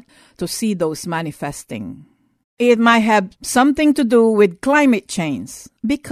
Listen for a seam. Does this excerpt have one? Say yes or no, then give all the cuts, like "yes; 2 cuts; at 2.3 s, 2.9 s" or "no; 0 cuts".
yes; 1 cut; at 2.4 s